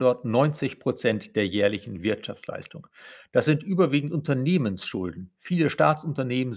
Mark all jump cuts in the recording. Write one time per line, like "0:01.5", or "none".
none